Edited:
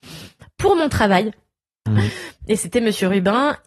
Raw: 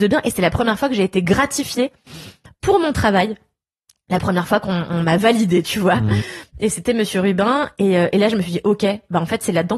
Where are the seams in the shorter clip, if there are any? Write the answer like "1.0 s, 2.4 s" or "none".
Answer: 1.9 s